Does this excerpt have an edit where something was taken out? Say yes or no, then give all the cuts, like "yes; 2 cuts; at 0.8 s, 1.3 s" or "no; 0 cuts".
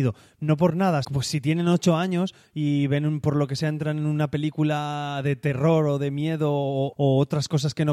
yes; 2 cuts; at 1.0 s, 6.9 s